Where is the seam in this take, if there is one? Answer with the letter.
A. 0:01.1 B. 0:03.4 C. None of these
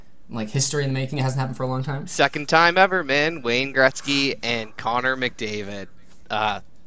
C